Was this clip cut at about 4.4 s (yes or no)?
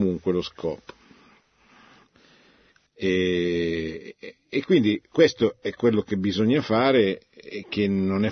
no